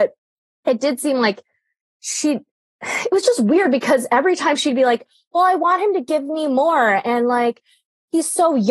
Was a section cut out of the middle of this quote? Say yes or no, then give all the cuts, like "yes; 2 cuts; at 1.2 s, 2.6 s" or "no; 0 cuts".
no; 0 cuts